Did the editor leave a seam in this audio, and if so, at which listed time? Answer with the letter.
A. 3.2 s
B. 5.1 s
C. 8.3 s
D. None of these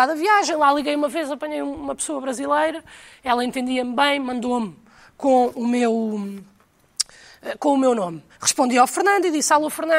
C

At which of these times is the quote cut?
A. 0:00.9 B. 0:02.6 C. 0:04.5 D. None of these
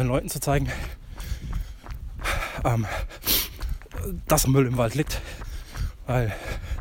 C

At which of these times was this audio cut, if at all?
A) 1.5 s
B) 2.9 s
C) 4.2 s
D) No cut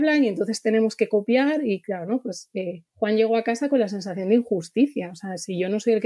B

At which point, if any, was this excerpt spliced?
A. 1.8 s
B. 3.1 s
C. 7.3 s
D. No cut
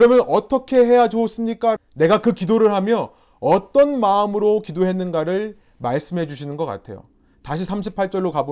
A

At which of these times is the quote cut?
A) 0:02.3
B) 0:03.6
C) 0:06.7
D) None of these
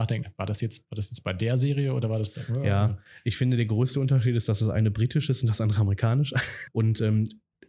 C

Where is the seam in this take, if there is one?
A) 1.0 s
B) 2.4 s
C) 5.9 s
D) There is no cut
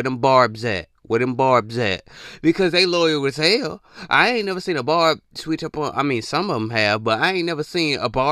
D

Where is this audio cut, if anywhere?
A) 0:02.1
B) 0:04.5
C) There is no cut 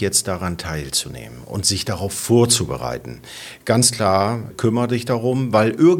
B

